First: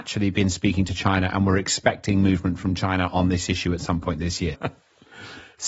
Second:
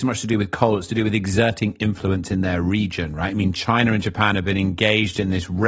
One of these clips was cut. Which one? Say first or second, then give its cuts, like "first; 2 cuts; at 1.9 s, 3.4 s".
first; 1 cut; at 4.5 s